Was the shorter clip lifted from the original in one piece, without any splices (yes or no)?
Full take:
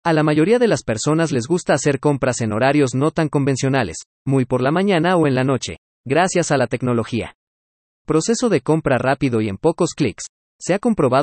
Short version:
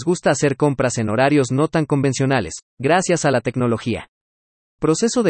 no